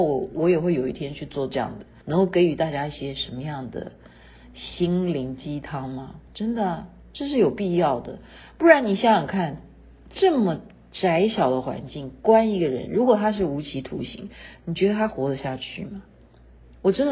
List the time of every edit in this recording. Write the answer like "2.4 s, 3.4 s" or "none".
2.0 s